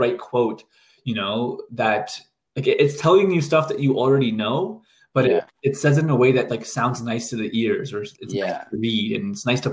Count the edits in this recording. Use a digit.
2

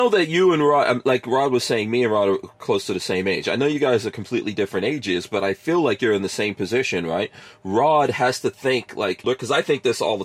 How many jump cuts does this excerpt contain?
1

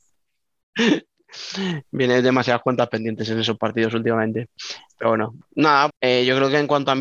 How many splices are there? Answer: 1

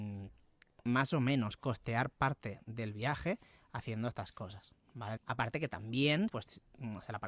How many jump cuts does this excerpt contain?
2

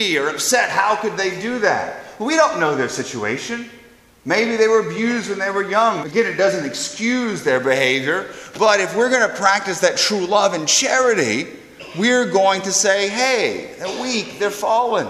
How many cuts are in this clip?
1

